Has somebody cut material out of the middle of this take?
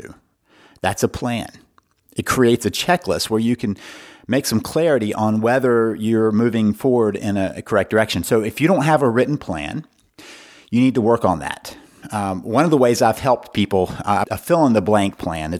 yes; 1 cut; at 14.2 s

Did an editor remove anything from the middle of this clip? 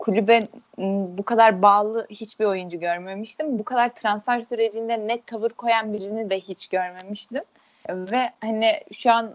no; 0 cuts

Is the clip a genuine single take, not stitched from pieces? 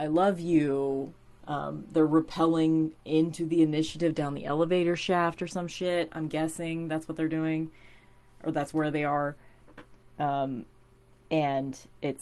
no; 1 cut; at 1.4 s

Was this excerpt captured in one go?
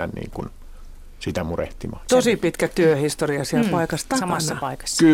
no; 1 cut; at 2.1 s

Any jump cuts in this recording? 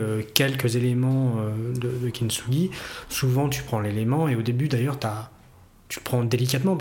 no; 0 cuts

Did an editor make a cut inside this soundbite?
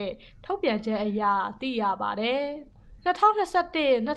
yes; 1 cut; at 3.0 s

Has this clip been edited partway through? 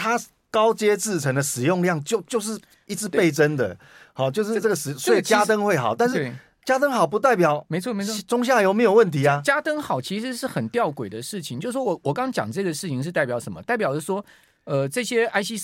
no; 0 cuts

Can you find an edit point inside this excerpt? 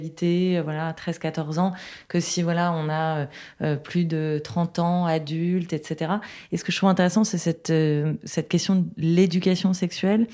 no; 0 cuts

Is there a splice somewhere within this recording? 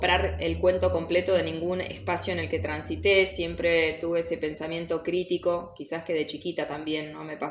no; 0 cuts

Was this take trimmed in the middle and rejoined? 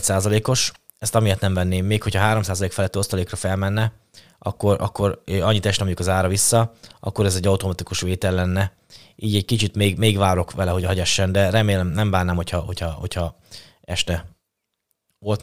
no; 0 cuts

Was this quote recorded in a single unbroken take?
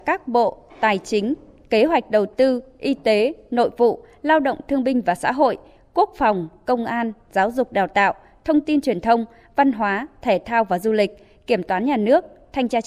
yes; 0 cuts

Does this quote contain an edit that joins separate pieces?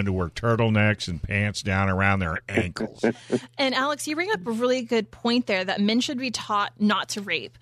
no; 0 cuts

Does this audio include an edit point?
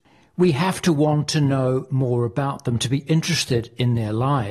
no; 0 cuts

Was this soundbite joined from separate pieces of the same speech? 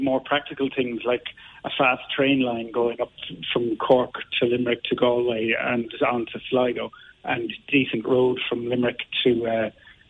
no; 0 cuts

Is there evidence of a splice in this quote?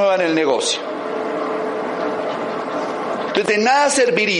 yes; 1 cut; at 3.3 s

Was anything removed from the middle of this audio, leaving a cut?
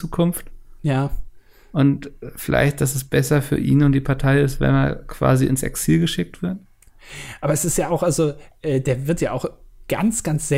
no; 0 cuts

